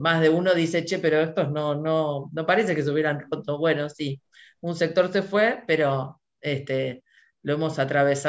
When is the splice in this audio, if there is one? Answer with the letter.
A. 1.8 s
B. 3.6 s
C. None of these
C